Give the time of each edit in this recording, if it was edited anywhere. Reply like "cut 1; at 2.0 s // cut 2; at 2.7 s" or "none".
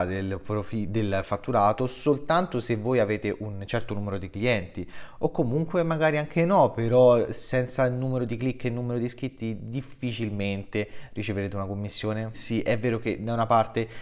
cut 1; at 12.3 s

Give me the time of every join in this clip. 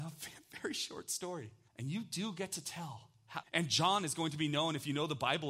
cut 1; at 1.7 s // cut 2; at 3.4 s

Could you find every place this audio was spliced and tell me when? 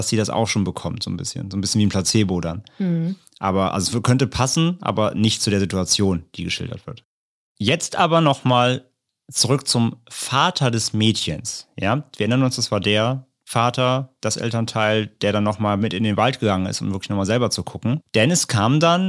none

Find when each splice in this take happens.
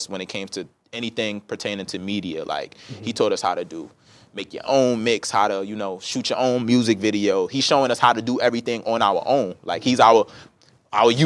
none

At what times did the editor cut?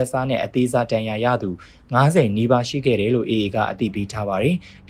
none

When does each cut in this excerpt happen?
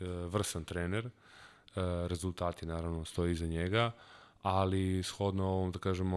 none

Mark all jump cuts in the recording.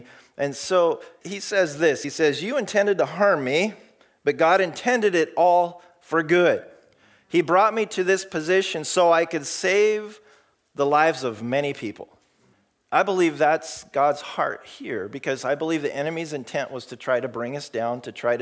none

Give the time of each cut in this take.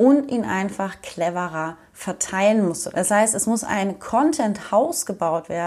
cut 1; at 2.9 s

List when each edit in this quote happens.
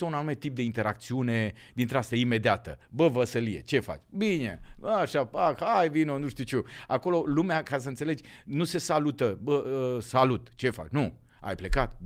none

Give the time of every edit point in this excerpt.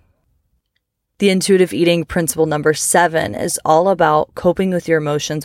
none

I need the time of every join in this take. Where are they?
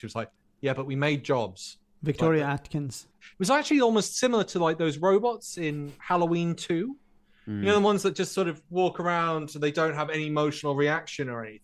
cut 1; at 3.2 s

